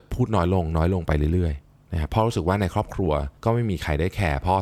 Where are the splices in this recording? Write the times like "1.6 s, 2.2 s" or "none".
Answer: 3.4 s

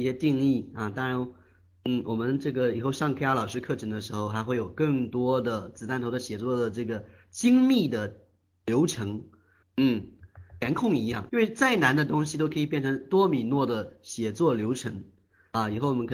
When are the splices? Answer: 9.6 s, 11.3 s

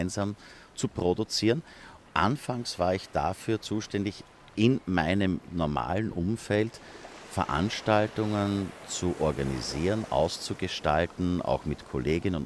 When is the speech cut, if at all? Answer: 2.0 s

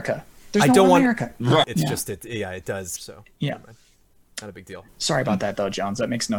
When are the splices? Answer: 1.6 s, 3.0 s, 4.9 s

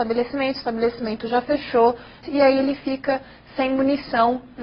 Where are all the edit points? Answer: 2.2 s

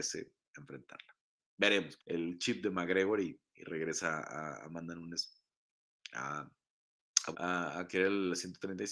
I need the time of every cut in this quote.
2.0 s, 7.3 s

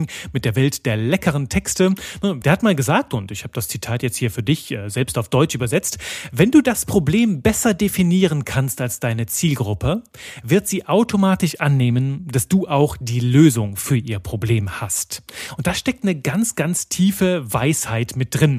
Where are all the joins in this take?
2.4 s

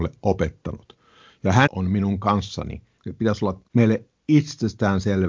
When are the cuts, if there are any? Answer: 1.7 s, 3.0 s

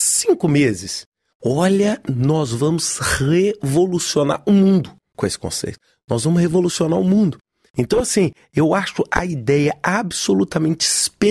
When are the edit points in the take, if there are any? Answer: none

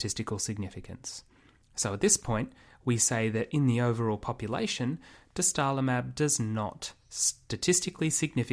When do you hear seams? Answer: none

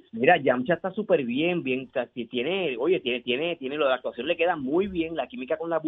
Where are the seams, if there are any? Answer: none

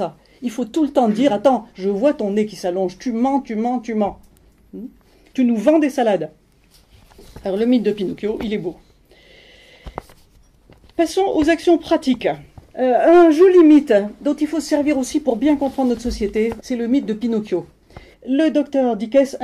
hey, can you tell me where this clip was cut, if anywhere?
12.7 s, 16.6 s, 18.1 s

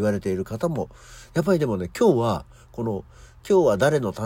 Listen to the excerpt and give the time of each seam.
none

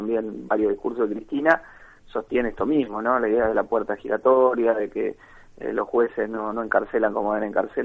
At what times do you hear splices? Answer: none

